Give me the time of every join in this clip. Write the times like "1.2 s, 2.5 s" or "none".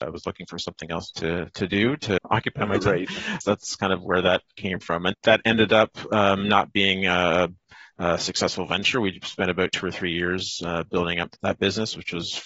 5.1 s